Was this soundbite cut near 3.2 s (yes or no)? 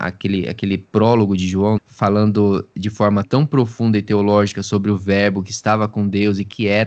yes